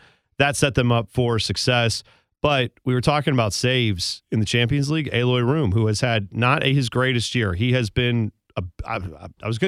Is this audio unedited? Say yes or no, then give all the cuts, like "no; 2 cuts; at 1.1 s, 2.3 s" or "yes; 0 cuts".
yes; 0 cuts